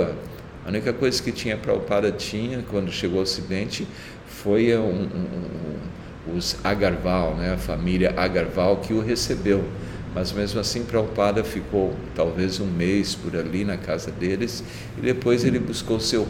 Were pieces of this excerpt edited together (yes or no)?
no